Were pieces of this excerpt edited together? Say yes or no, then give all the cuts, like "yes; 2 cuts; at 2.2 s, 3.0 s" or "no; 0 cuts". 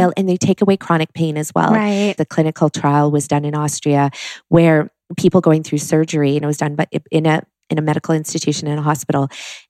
yes; 2 cuts; at 2.2 s, 7.6 s